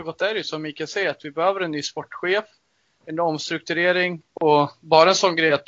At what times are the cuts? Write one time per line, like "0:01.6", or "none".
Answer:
0:04.3